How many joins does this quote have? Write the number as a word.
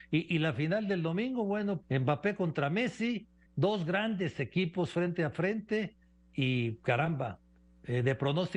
two